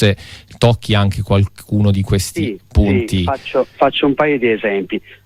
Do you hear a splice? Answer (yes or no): no